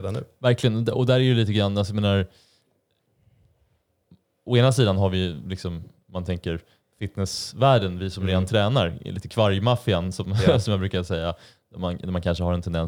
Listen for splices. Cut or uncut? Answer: uncut